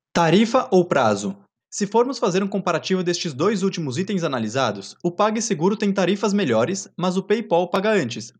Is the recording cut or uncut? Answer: cut